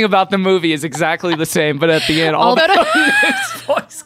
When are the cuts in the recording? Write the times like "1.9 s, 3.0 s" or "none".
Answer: 2.6 s